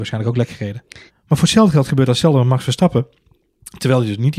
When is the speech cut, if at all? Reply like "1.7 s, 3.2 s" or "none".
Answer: 1.1 s